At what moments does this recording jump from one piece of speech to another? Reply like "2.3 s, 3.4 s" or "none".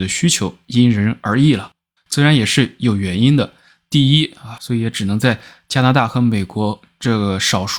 2.0 s, 4.6 s